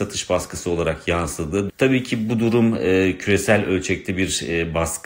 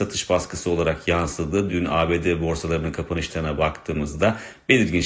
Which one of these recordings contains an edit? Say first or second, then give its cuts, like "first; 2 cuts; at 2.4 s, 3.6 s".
first; 1 cut; at 1.7 s